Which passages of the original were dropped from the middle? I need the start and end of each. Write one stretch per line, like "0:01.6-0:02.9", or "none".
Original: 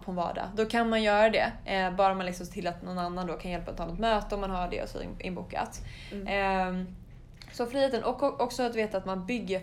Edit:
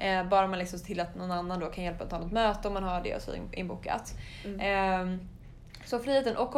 none